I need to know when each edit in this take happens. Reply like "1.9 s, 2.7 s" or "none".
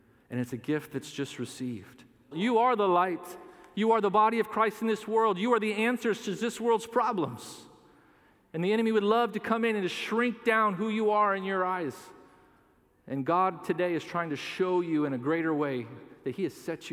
2.3 s